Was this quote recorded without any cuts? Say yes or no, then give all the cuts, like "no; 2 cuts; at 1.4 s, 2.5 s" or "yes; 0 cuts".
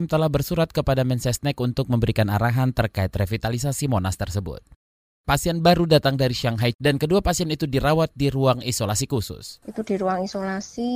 no; 2 cuts; at 5.2 s, 6.7 s